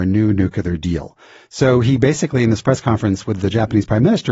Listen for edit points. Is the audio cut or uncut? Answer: uncut